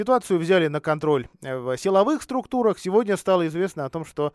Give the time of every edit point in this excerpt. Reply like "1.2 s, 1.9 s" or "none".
none

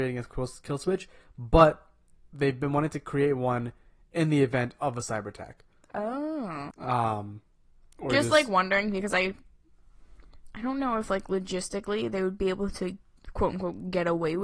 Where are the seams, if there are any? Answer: 6.7 s

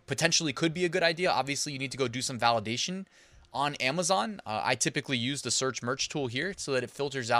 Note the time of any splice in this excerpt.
none

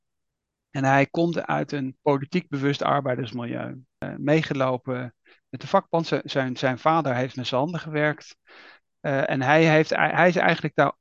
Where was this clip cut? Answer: 2.0 s

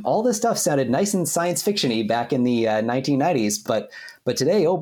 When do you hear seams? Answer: none

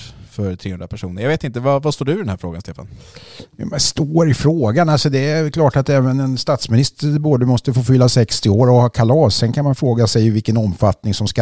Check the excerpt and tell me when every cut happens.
none

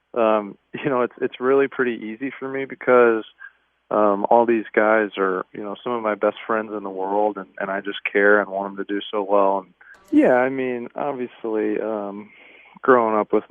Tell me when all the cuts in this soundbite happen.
9.9 s

